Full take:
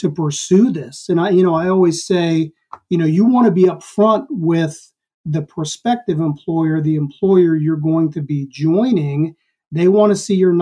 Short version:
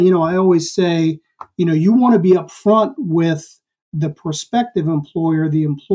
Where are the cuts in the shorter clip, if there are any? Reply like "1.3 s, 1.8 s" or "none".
none